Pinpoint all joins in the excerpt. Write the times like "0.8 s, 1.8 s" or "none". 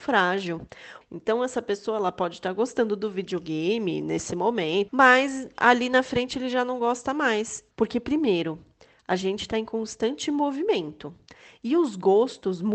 1.0 s, 4.9 s, 7.7 s